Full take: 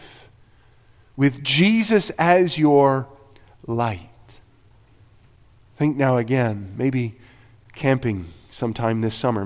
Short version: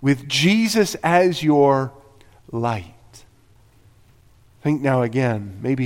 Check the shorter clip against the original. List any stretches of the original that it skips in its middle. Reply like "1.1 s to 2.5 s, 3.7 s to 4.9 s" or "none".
none